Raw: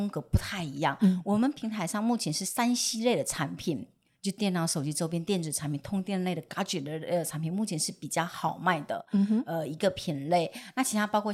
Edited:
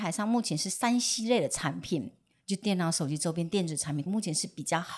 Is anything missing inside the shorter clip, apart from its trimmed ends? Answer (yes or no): yes